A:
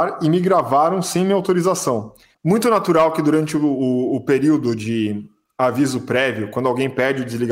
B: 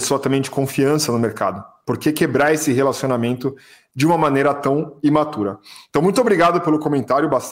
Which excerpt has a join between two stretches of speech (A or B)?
A